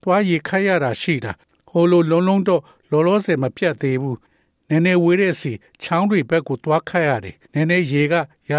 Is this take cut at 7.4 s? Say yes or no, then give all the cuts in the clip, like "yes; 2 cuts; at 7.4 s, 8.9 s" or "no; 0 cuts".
yes; 1 cut; at 7.4 s